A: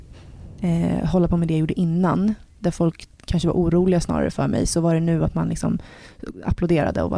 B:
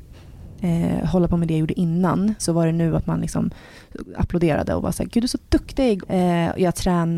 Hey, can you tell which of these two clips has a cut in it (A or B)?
B